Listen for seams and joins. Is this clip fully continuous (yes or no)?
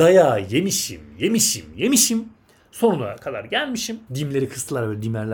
no